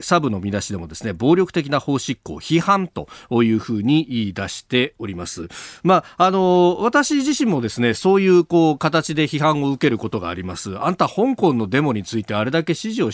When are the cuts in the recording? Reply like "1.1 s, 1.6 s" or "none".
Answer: none